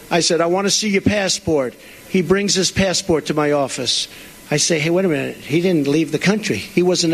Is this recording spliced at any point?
no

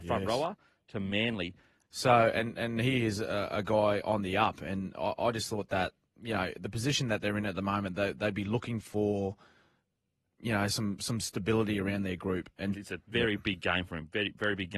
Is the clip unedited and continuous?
no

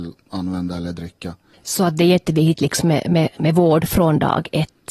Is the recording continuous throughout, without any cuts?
no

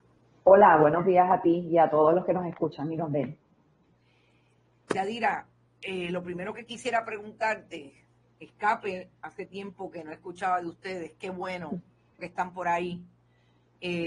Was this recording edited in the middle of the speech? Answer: yes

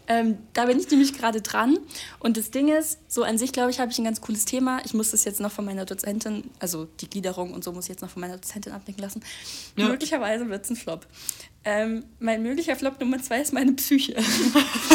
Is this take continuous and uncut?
no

